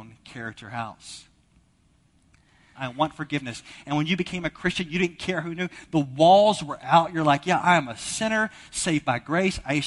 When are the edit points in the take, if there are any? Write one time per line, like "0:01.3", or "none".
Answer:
0:02.8